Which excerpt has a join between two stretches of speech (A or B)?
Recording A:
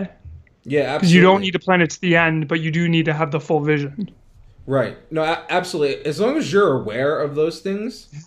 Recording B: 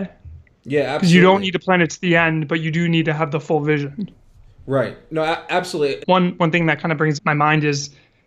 B